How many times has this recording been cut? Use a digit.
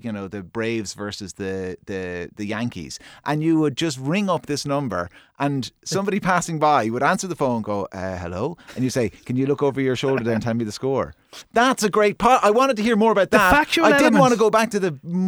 1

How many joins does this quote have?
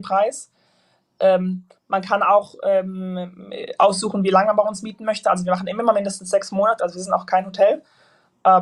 1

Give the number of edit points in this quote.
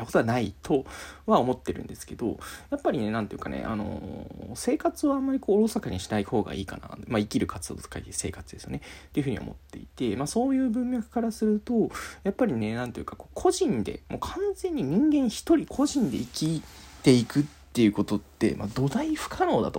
0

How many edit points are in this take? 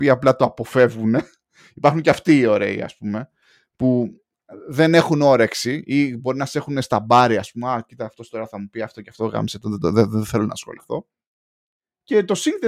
0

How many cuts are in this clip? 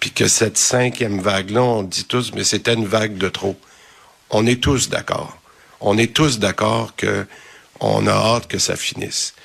0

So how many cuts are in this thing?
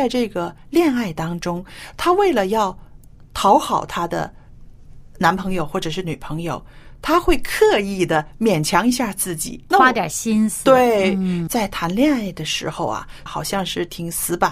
3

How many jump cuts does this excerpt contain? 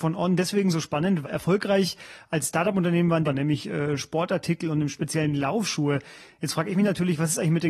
2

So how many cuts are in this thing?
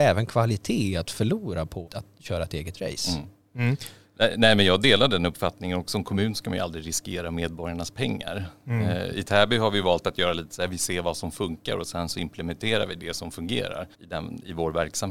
2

